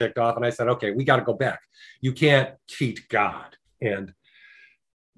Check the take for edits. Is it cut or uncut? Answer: cut